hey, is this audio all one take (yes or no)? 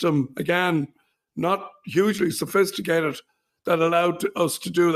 yes